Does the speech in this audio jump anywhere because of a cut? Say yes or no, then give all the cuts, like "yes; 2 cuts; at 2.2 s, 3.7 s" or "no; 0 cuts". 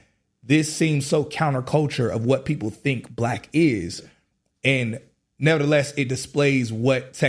no; 0 cuts